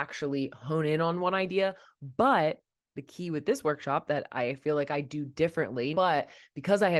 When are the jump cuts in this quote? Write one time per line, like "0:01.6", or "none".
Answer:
0:05.9